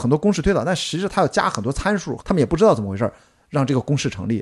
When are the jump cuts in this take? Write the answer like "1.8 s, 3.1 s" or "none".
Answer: 2.2 s